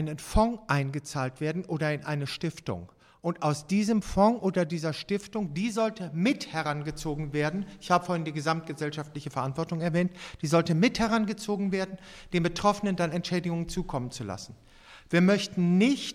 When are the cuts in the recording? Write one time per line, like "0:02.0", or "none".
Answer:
none